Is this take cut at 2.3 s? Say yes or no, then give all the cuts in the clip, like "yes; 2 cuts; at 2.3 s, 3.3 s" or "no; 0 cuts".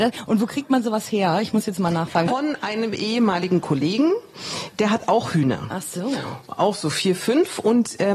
yes; 1 cut; at 2.3 s